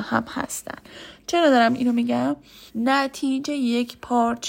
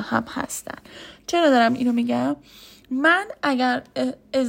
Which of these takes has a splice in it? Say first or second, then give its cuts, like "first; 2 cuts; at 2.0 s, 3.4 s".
first; 1 cut; at 2.7 s